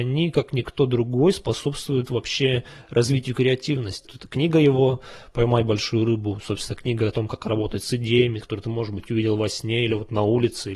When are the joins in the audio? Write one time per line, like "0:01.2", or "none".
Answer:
0:04.0
0:08.4